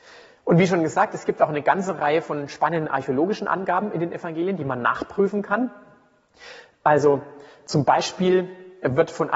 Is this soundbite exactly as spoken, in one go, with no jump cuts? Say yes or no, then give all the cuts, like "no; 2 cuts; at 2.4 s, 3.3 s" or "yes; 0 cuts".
yes; 0 cuts